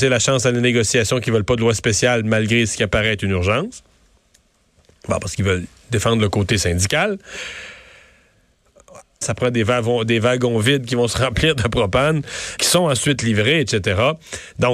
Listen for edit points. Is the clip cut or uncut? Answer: cut